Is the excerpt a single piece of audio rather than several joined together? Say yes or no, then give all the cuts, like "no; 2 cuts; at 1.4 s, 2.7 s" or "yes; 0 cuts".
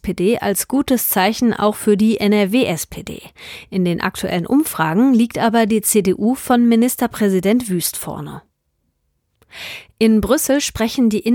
yes; 0 cuts